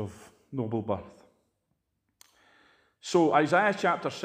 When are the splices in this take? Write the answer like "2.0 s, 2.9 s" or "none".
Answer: none